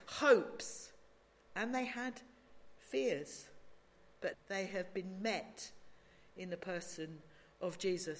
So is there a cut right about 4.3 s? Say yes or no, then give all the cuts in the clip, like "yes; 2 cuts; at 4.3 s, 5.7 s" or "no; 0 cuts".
yes; 1 cut; at 4.3 s